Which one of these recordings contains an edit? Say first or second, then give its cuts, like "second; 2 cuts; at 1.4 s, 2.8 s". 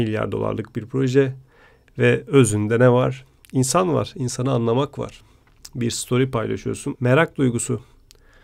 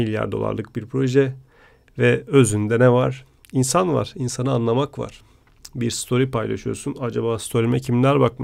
first; 1 cut; at 6.9 s